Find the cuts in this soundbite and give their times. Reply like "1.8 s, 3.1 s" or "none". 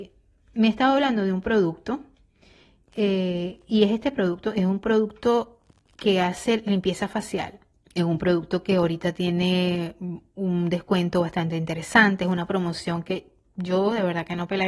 7.7 s